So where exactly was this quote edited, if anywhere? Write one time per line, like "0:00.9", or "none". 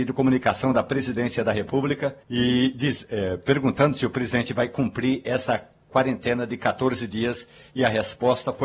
0:02.2